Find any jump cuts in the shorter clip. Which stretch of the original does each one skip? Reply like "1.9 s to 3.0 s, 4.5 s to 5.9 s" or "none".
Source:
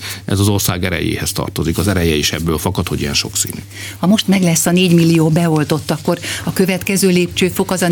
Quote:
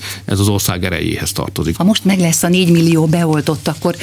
1.8 s to 4.0 s